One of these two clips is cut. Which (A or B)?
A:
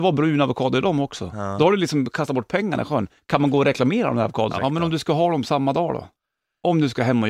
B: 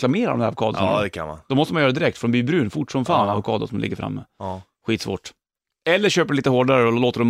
A